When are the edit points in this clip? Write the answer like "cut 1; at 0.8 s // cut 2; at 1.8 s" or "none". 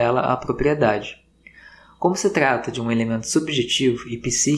none

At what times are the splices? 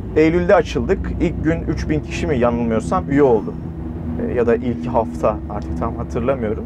none

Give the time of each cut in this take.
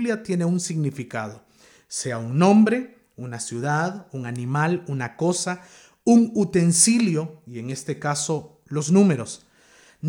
none

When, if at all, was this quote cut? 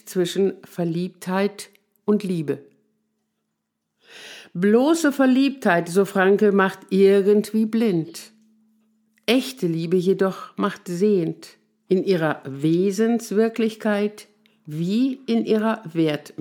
cut 1; at 11.9 s

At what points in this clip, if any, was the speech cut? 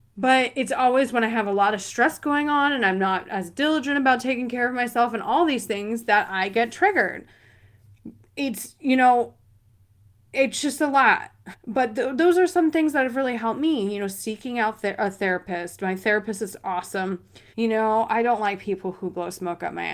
cut 1; at 11.5 s // cut 2; at 17.5 s

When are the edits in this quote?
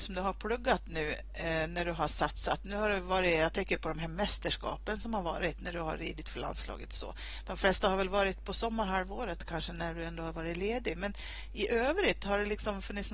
none

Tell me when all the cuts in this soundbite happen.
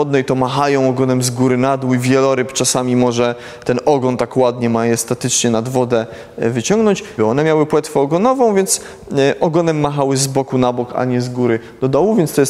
cut 1; at 7.2 s

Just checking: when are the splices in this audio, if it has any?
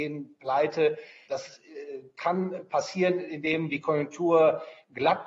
cut 1; at 1.3 s

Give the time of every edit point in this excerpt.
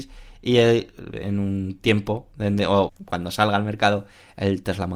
cut 1; at 2.9 s

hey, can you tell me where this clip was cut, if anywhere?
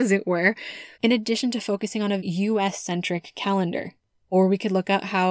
cut 1; at 0.9 s // cut 2; at 2.2 s // cut 3; at 4.2 s

